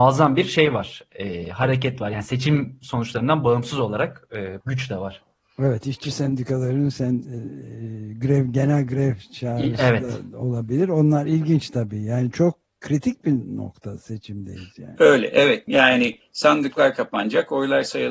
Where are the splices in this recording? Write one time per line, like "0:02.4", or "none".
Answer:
0:04.6
0:15.7